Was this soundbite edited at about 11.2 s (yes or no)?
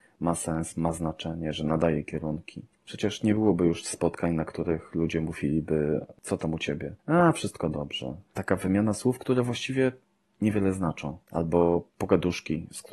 no